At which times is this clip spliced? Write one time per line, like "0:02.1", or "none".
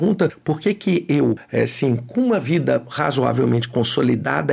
none